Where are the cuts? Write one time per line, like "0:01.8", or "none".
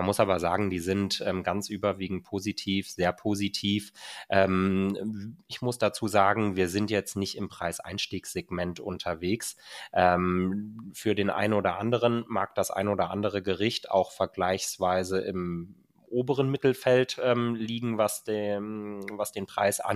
none